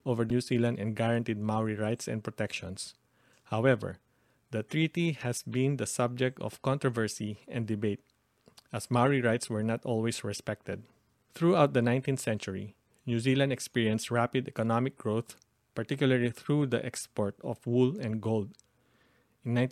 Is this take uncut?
yes; 0 cuts

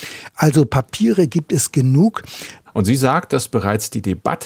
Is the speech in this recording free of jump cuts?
no; 1 cut; at 2.7 s

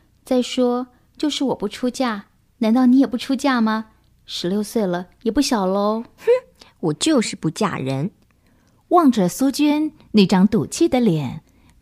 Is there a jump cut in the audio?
no; 0 cuts

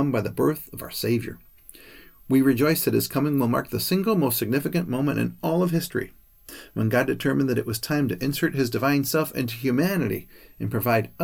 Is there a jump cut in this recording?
no; 0 cuts

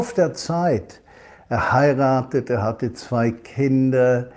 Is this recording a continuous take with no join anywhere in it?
yes; 0 cuts

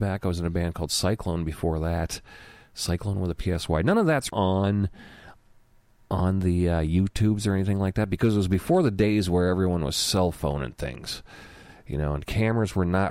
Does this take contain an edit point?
yes; 1 cut; at 4.3 s

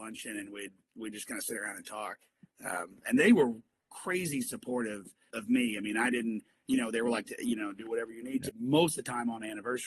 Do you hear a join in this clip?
yes; 3 cuts; at 5.3 s, 7.3 s, 8.5 s

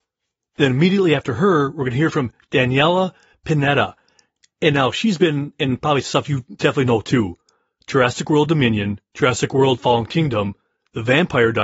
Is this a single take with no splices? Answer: yes; 0 cuts

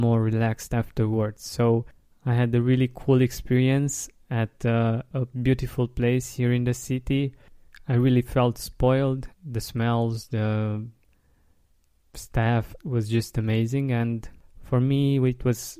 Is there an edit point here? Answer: yes; 2 cuts; at 9.3 s, 12.8 s

